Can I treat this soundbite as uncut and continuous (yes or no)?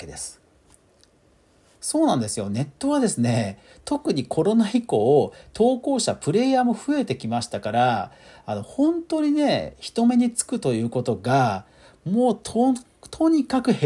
yes